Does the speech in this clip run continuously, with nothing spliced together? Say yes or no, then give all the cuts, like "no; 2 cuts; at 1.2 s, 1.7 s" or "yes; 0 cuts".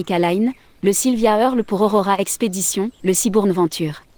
no; 1 cut; at 3.0 s